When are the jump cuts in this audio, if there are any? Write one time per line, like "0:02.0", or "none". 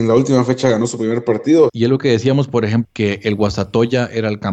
0:01.7
0:02.8